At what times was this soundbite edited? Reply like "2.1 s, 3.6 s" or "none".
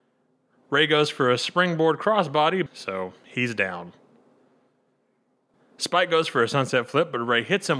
2.7 s, 5.5 s

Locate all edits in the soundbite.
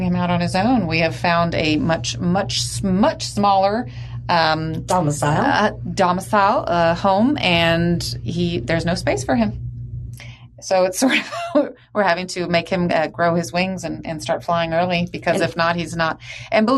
none

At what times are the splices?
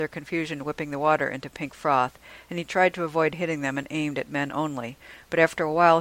none

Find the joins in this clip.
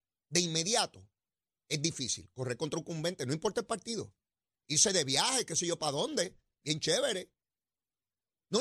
4.5 s

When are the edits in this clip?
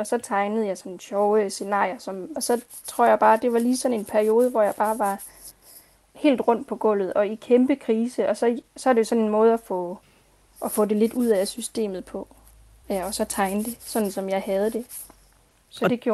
2.4 s

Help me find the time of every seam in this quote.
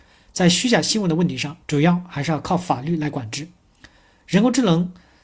1.6 s

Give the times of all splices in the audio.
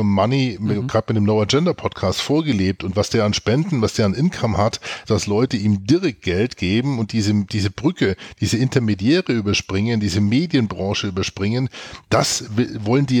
5.1 s

